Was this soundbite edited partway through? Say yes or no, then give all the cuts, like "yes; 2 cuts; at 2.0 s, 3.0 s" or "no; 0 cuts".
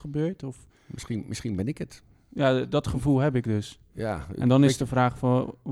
no; 0 cuts